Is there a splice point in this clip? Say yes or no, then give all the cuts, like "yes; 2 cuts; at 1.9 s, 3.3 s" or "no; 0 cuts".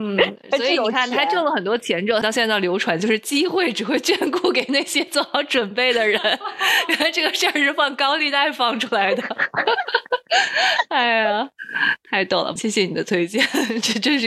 yes; 2 cuts; at 2.2 s, 12.6 s